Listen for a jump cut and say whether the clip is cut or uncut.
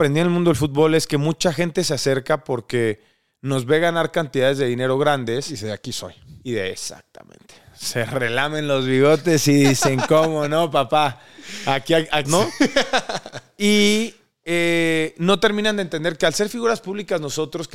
cut